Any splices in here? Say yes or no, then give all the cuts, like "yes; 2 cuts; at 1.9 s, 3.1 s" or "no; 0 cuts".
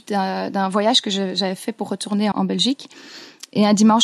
yes; 1 cut; at 2.3 s